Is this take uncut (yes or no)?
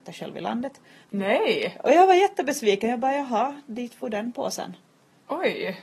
no